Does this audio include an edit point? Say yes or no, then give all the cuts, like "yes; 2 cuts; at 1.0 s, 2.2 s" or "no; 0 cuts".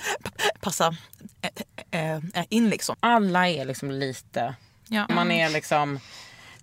yes; 2 cuts; at 2.9 s, 5.1 s